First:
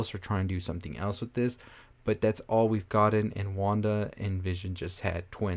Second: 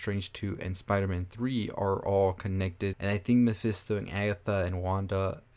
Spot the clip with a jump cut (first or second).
second